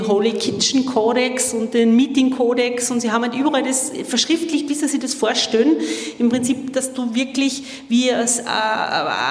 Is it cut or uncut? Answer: uncut